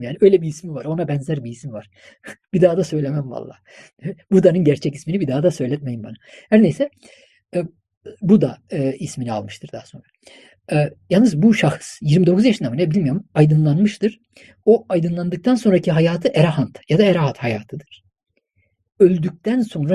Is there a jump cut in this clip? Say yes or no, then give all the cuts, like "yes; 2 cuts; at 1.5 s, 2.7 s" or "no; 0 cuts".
no; 0 cuts